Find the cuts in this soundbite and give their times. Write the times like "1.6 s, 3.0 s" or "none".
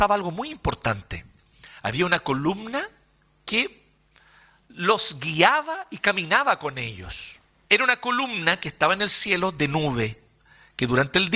7.7 s

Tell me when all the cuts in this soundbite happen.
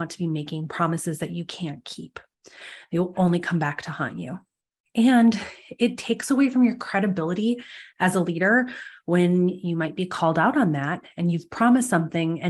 none

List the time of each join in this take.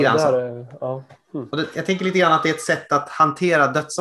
1.7 s

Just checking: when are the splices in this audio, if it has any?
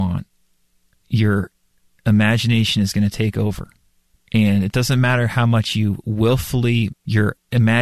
6.9 s

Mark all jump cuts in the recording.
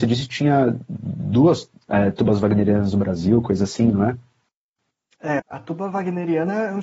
5.4 s

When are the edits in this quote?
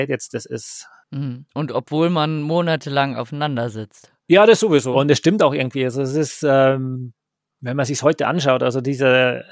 4.9 s

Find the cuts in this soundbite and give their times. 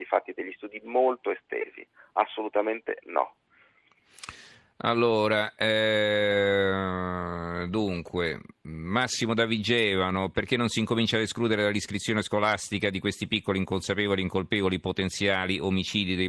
none

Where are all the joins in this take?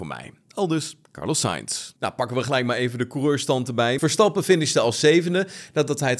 2.0 s, 4.0 s

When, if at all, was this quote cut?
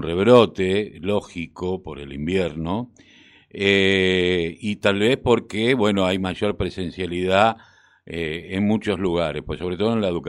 none

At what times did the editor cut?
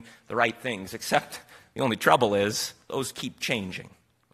none

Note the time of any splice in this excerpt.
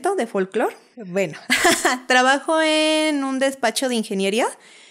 0.9 s

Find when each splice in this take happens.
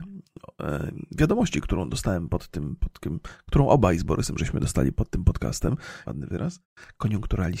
6.0 s

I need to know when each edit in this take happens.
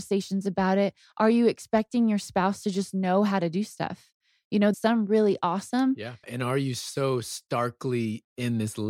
4.7 s, 6.2 s

